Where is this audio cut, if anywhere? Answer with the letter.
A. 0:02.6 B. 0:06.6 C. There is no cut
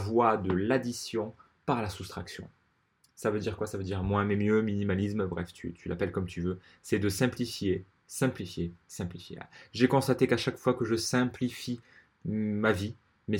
C